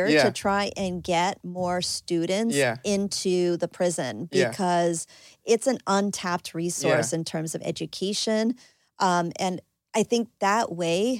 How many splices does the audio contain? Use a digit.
0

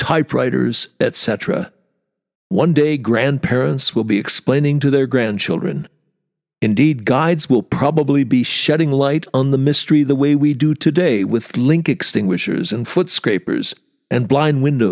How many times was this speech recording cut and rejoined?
1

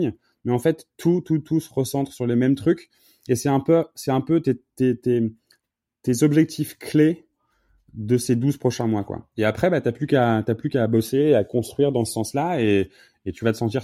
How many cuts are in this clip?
0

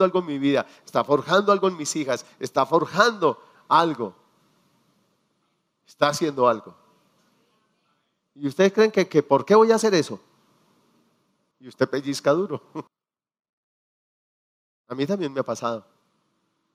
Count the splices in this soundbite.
3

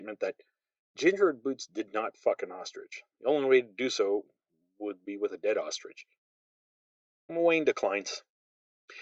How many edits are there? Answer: 1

